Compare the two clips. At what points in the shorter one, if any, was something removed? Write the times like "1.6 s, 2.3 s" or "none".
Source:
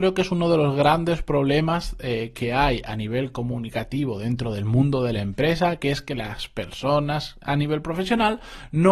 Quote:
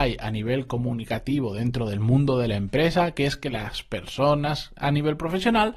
none